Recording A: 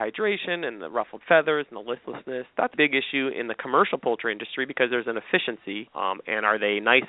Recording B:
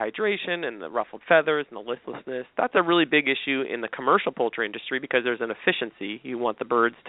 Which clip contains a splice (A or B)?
A